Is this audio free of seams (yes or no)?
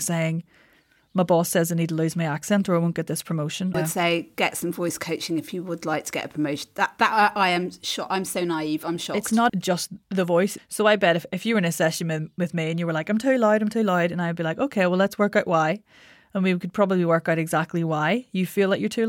no